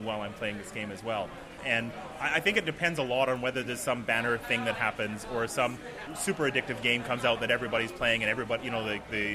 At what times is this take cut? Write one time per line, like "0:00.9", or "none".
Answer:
0:01.6
0:06.1